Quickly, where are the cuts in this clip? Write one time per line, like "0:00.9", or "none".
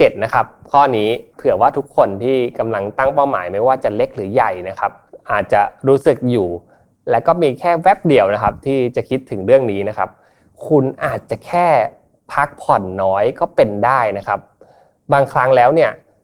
none